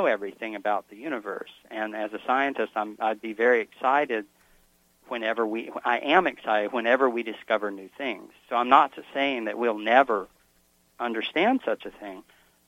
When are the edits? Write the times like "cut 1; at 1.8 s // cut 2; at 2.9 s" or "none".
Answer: none